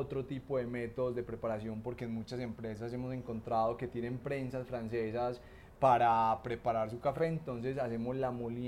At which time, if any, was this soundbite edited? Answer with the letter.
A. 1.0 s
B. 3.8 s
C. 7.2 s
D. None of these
D